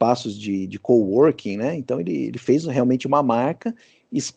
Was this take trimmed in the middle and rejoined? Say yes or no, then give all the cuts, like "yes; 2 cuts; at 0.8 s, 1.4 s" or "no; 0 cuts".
no; 0 cuts